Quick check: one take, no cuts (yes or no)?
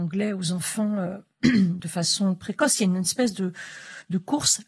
no